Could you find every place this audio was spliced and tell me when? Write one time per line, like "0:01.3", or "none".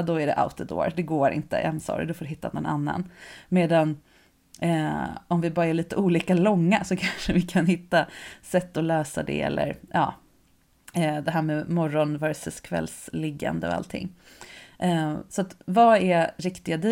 none